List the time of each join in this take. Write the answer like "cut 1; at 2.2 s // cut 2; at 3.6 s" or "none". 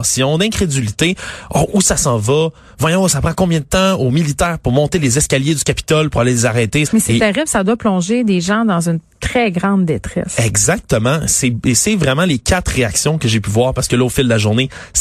cut 1; at 6.8 s